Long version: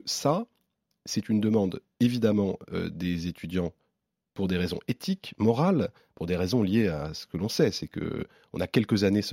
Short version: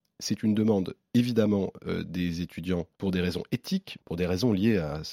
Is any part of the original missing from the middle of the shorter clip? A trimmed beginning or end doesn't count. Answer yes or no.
yes